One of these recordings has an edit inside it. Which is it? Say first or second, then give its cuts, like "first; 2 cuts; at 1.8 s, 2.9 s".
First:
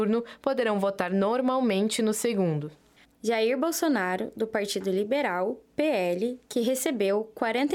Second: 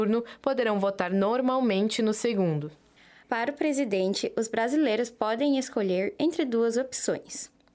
first; 1 cut; at 3.0 s